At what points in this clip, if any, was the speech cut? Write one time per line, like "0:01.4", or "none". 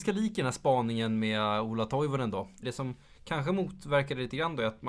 0:02.6